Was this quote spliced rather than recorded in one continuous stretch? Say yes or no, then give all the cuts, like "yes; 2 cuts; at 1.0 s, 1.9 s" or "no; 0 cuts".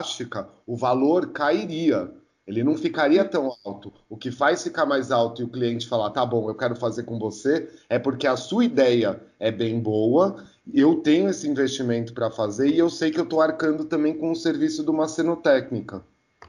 no; 0 cuts